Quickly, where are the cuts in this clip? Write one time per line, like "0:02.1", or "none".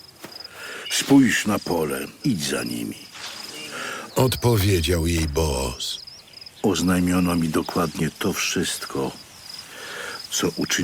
0:02.2
0:04.1